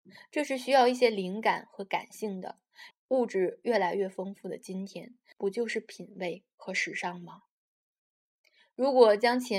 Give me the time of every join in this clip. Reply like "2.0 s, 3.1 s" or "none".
2.9 s, 5.3 s